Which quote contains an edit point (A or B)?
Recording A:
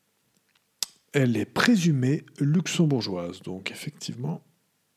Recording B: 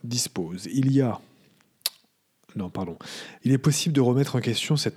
B